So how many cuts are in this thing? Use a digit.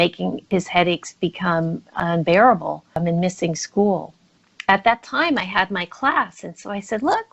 0